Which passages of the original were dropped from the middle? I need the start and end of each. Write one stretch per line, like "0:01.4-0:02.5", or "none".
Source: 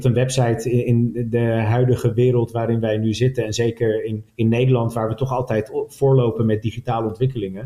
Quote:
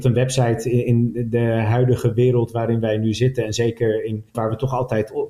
0:04.3-0:04.9

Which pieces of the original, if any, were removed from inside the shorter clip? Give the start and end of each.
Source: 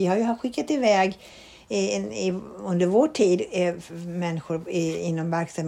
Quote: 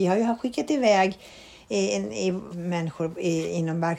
0:02.5-0:04.0

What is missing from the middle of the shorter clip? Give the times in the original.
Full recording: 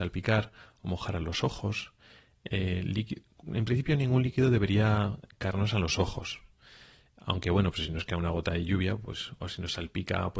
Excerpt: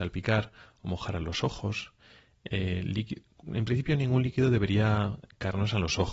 none

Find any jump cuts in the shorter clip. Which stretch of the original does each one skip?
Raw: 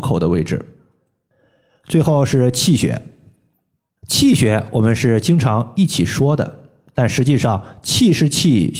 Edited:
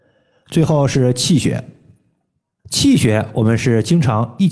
none

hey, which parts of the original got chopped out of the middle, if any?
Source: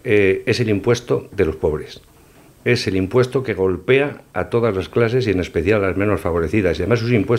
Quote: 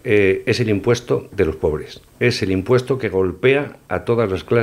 0:02.1-0:02.5

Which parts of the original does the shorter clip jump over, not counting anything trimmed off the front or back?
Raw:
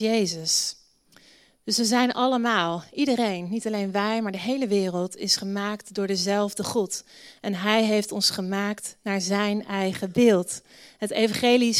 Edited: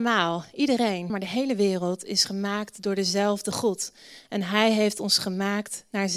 0:03.5-0:04.2

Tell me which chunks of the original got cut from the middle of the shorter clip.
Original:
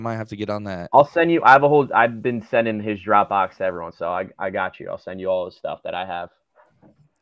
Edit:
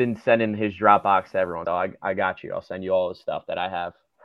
0:03.9-0:04.0

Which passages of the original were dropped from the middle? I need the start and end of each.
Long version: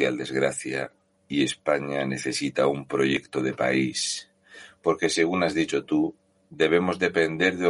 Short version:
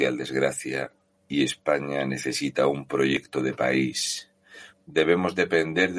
0:04.7-0:06.3

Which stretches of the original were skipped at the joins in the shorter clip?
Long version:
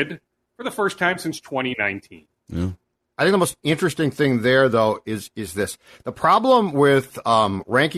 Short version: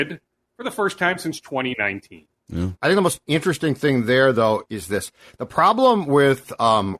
0:02.8-0:03.1
0:05.0-0:05.3

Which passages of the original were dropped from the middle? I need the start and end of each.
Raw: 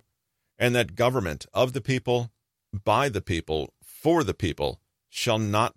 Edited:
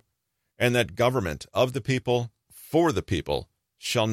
0:02.5-0:03.8

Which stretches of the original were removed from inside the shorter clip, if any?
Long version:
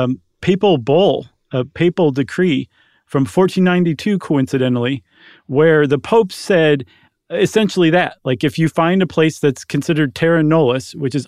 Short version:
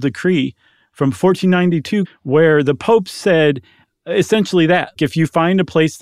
0:04.2-0:05.3
0:08.2-0:08.4

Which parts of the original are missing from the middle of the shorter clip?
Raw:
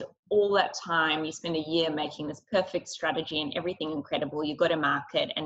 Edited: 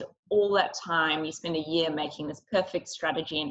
none

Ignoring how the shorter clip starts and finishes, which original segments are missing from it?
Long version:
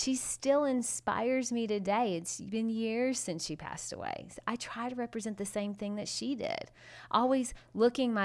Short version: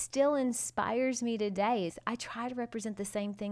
0:02.2-0:04.3

